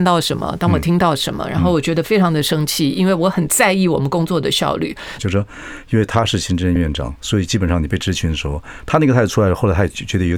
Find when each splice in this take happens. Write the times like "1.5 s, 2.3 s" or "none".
5.2 s, 6.8 s